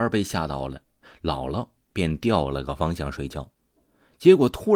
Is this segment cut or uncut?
uncut